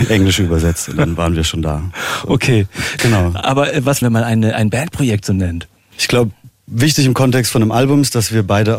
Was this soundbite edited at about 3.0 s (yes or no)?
yes